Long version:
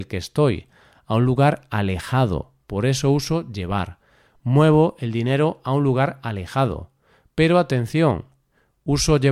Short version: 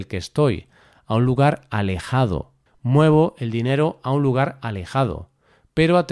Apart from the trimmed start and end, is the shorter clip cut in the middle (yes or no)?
yes